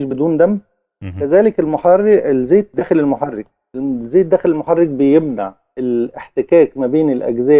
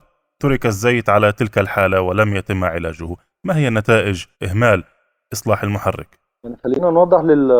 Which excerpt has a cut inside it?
second; 1 cut; at 4.3 s

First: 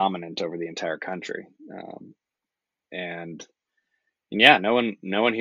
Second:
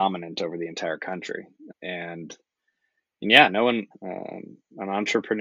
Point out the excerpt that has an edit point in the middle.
second; 2 cuts; at 1.7 s, 3.9 s

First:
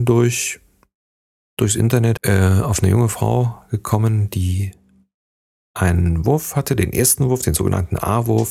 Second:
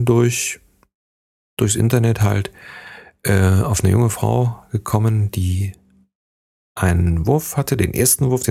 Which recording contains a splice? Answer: first; 1 cut; at 2.2 s

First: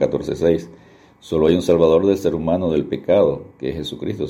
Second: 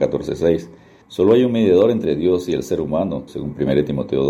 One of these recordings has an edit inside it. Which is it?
second; 2 cuts; at 1.0 s, 3.3 s

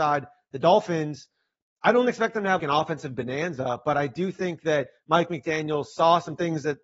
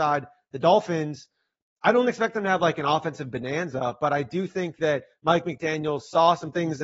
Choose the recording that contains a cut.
first; 1 cut; at 2.6 s

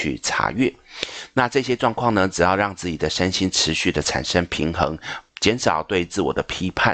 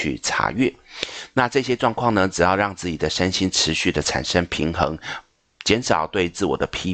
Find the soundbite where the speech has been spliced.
first; 1 cut; at 5.3 s

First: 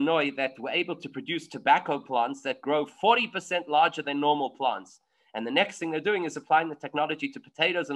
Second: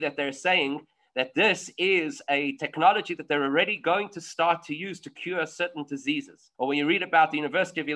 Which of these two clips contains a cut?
second; 1 cut; at 6.5 s

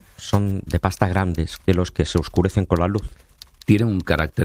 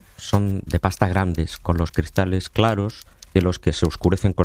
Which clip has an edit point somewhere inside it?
first; 1 cut; at 1.6 s

